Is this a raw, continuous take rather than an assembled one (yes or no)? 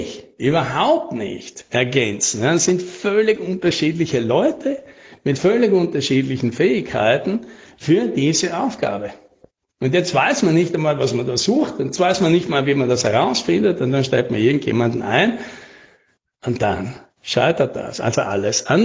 yes